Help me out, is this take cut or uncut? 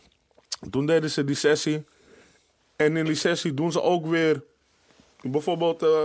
uncut